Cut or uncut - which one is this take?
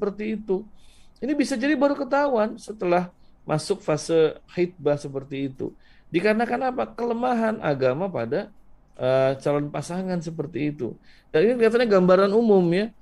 uncut